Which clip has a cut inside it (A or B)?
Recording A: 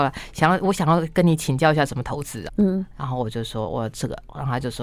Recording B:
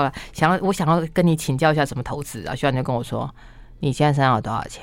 A